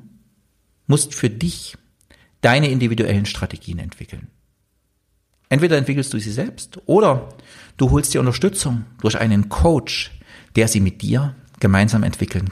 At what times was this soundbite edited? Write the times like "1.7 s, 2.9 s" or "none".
none

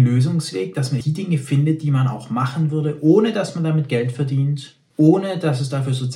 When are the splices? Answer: 1.0 s, 4.9 s

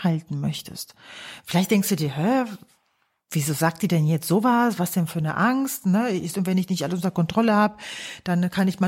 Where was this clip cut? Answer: 6.3 s

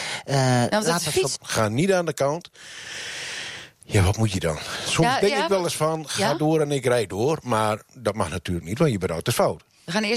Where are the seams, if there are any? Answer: 1.4 s

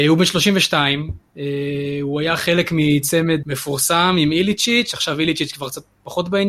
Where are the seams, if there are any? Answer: 3.4 s

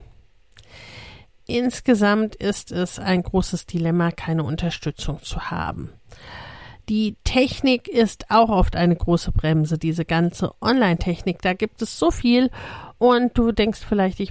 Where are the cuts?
none

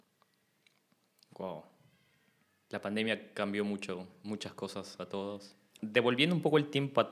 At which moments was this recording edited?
5.8 s

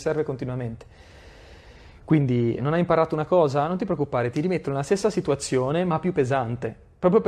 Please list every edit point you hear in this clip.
2.6 s

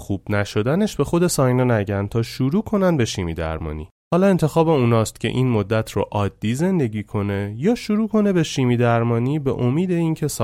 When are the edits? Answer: 4.0 s

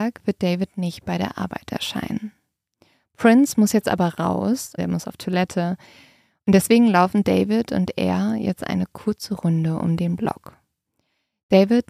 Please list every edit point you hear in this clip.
4.8 s

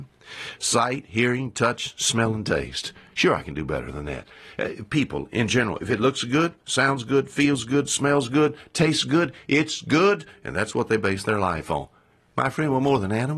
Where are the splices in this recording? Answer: none

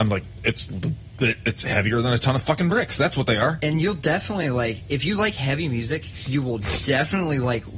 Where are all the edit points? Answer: none

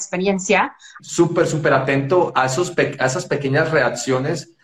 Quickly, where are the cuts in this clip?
1.0 s

